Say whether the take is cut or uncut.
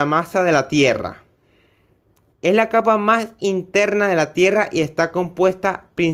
cut